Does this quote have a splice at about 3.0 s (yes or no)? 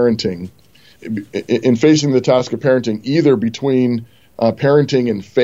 no